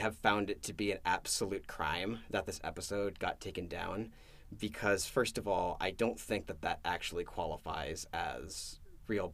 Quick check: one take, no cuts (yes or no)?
yes